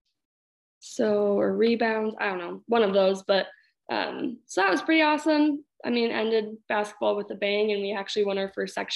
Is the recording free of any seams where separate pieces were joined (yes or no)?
yes